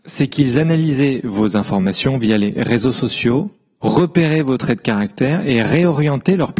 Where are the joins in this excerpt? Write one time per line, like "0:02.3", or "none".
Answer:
none